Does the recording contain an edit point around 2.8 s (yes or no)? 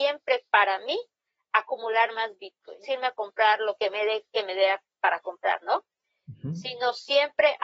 yes